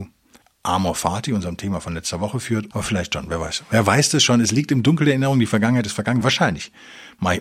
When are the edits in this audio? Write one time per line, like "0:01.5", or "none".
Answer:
0:02.7
0:06.2